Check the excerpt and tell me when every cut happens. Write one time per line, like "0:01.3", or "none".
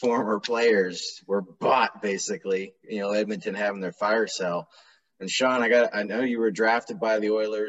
none